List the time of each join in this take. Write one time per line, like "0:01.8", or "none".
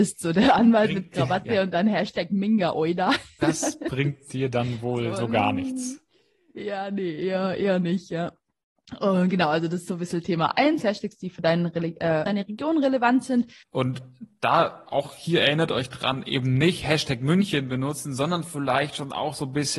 0:12.3
0:13.6